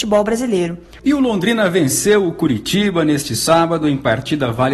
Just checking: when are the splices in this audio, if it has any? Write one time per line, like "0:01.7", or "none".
0:01.0